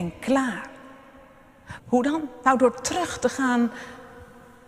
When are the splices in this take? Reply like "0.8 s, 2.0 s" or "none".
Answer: 1.8 s